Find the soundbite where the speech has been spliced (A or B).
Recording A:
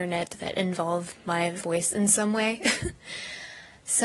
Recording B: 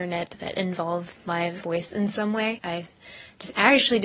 B